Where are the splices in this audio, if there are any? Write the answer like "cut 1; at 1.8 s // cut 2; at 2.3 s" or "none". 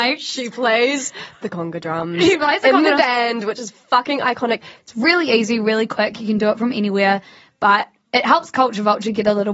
cut 1; at 4.8 s